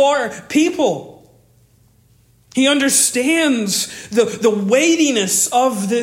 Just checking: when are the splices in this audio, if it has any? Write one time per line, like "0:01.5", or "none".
none